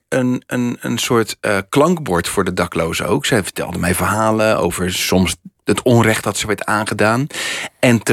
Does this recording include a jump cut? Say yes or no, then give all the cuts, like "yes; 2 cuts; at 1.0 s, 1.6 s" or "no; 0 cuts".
no; 0 cuts